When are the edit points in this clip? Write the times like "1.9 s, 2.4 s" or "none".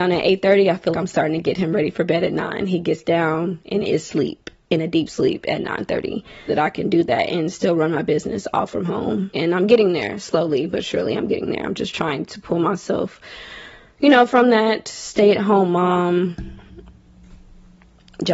0.9 s, 6.5 s, 9.3 s